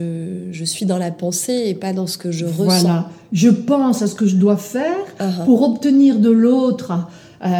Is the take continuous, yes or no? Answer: yes